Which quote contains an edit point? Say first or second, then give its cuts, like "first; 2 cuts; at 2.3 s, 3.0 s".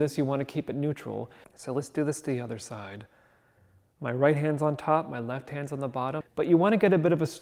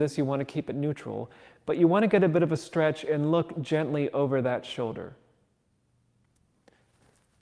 first; 2 cuts; at 1.4 s, 6.2 s